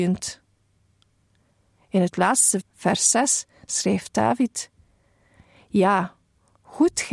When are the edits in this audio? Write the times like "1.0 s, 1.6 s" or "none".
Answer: 2.6 s